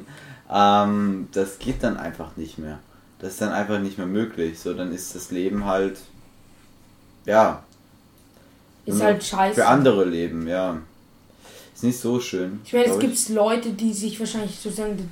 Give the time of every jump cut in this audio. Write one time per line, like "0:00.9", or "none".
none